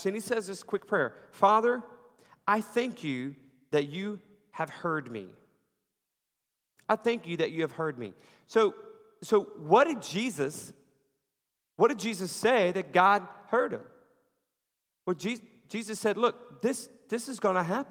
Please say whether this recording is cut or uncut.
uncut